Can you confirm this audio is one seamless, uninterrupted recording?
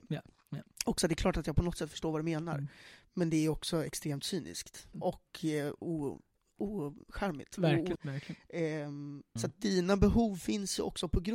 no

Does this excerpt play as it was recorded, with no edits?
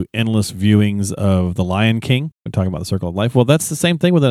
no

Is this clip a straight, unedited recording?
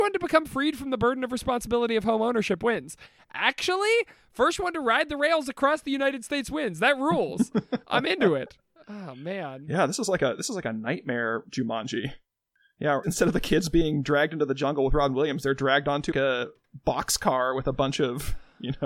no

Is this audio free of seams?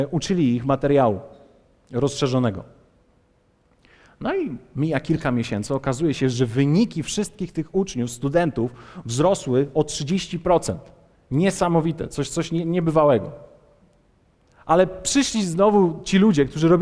yes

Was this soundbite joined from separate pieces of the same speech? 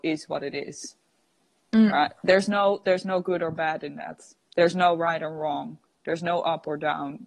no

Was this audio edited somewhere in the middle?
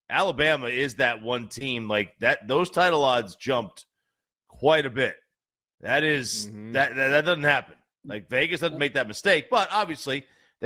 no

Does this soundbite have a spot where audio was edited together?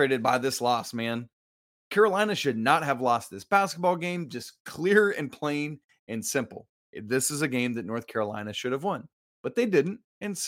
no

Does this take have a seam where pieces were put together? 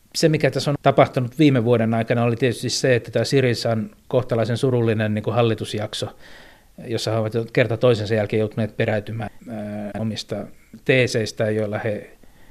yes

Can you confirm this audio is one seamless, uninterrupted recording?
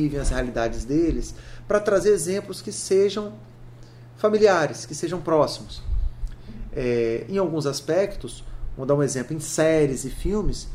yes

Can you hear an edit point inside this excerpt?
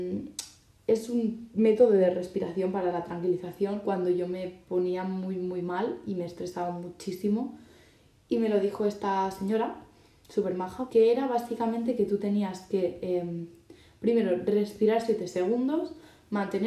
yes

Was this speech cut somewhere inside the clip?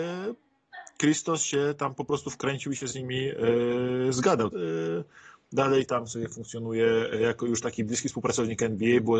yes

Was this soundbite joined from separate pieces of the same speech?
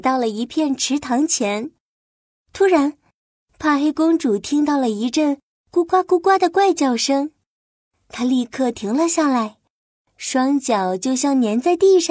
no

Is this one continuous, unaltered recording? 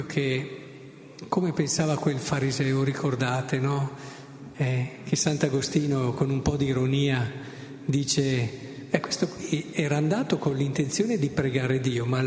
no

